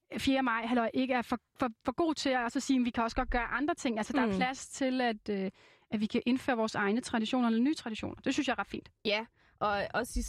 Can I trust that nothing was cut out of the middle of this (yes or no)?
yes